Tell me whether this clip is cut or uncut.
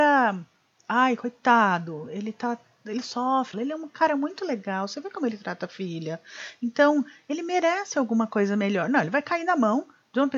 cut